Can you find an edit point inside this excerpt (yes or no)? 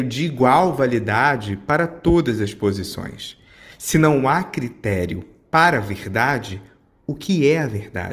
no